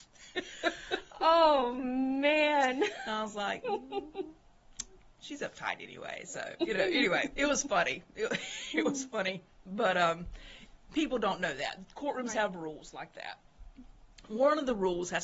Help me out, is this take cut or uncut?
uncut